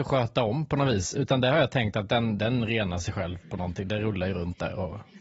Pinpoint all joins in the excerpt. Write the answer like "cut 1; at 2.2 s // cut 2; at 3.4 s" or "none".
none